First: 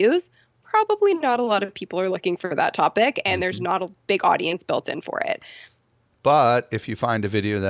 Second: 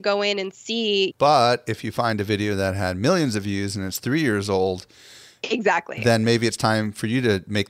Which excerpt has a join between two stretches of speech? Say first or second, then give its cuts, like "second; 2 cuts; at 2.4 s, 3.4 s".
second; 1 cut; at 1.1 s